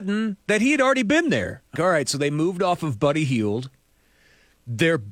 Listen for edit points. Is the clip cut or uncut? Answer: cut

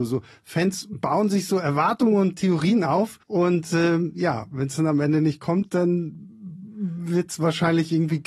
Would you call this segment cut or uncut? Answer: cut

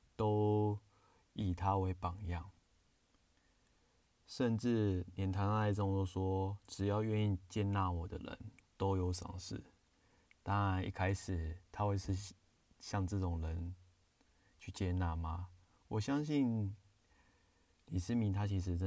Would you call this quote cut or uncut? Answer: uncut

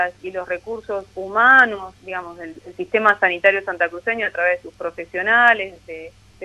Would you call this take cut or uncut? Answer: cut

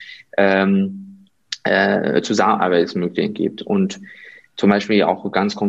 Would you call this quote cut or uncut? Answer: uncut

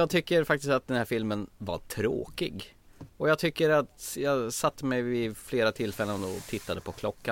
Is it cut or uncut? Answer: cut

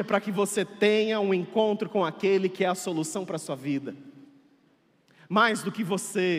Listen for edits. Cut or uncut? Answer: uncut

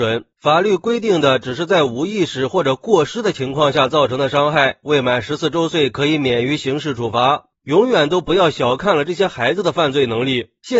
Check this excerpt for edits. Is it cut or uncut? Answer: cut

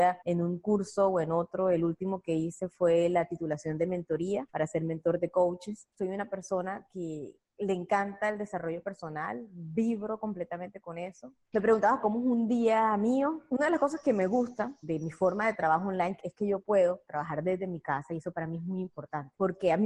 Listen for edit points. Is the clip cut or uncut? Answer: uncut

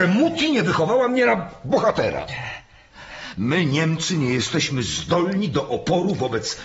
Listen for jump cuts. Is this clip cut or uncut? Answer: uncut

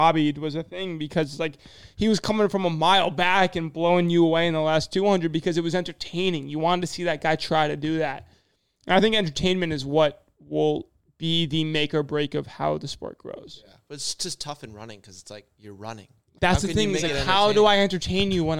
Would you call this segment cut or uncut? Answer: cut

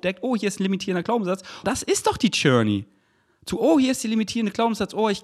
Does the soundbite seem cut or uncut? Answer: cut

